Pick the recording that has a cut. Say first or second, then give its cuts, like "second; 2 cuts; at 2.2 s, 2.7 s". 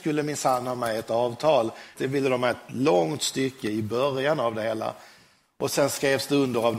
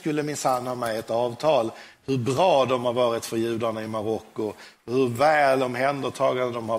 first; 1 cut; at 2.0 s